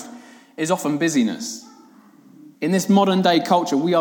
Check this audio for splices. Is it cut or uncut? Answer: cut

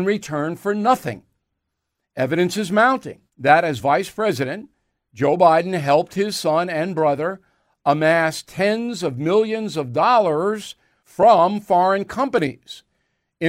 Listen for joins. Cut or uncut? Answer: cut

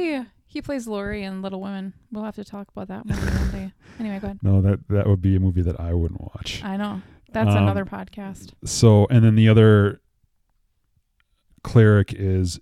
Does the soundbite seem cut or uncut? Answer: uncut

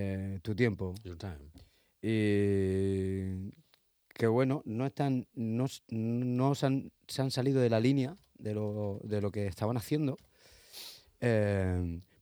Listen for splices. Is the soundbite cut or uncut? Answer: uncut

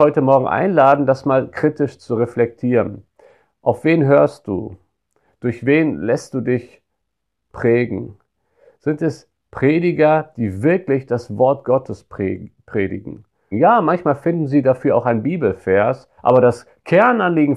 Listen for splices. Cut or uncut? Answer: cut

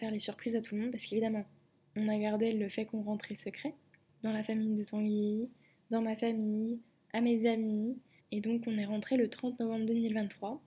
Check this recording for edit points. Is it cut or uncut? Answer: cut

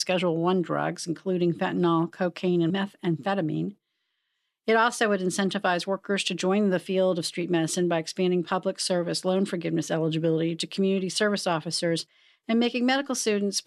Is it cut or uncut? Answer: uncut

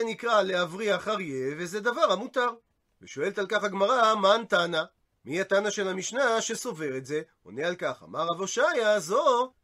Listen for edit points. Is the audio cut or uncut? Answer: uncut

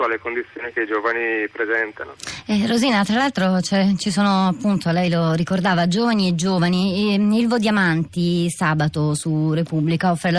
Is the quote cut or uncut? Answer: uncut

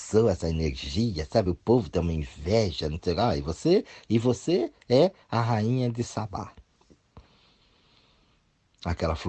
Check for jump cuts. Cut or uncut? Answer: uncut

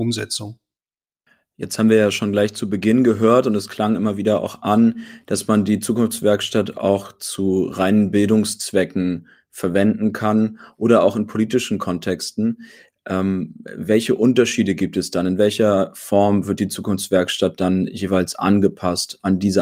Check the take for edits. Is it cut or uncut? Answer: uncut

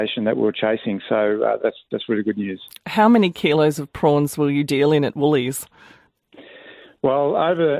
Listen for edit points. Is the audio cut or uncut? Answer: uncut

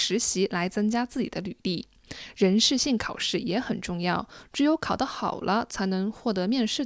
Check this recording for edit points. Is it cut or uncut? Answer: uncut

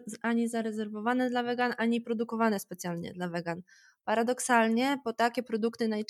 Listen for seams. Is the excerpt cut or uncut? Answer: uncut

